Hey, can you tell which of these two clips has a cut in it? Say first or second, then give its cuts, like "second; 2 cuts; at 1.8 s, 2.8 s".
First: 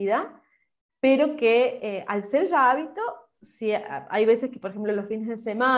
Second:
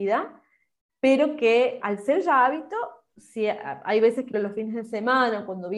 second; 2 cuts; at 1.8 s, 4.3 s